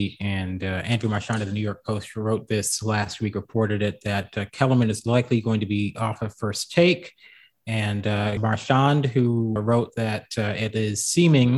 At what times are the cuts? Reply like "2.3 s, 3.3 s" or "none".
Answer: 8.4 s, 9.6 s

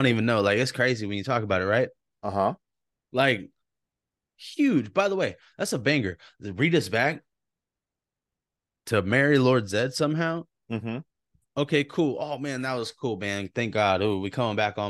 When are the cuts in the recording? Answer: 2.2 s

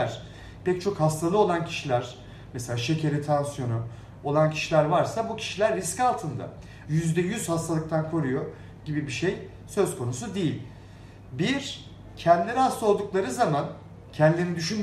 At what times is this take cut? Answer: 6.9 s

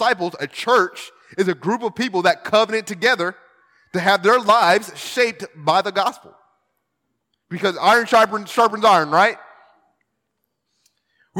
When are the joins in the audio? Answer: none

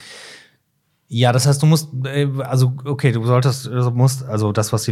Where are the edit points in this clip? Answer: none

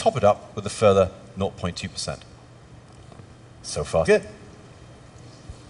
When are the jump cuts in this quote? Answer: 4.0 s

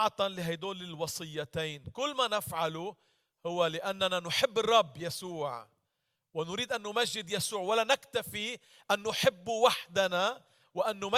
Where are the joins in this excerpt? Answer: none

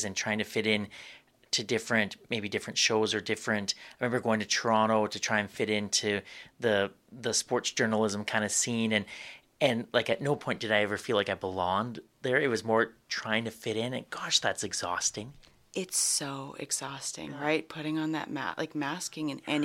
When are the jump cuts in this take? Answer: none

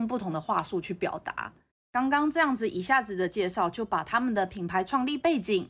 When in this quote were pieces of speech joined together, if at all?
1.7 s

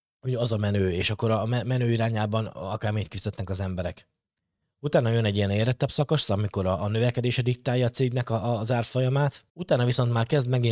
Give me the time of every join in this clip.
9.5 s

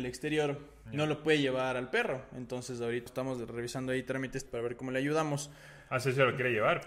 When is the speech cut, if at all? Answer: 3.1 s, 4.5 s

